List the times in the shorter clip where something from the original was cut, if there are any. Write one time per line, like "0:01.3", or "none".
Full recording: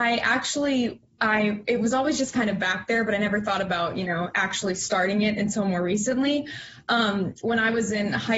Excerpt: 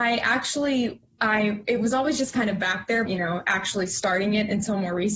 0:03.1